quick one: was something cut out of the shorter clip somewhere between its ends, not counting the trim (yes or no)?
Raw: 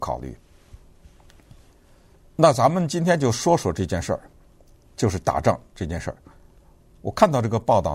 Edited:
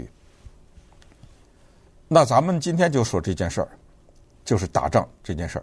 yes